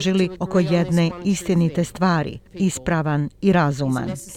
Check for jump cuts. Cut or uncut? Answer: cut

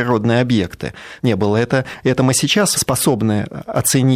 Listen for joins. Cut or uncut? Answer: cut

